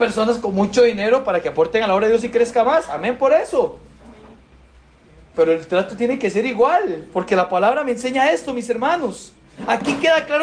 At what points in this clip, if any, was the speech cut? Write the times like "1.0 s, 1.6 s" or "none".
7.1 s